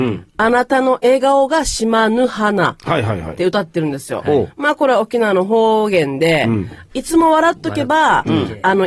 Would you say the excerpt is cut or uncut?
uncut